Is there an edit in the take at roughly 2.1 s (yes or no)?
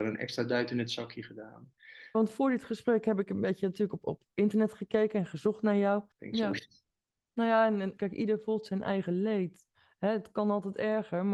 yes